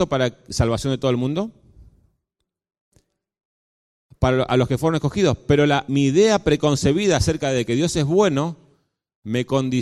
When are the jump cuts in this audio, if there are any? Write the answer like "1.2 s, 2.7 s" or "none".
5.9 s